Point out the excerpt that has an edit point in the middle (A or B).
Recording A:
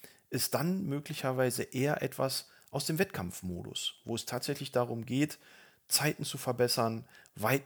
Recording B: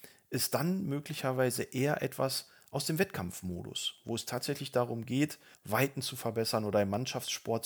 B